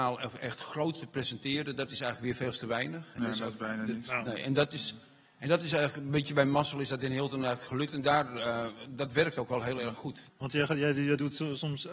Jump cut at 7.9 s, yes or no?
no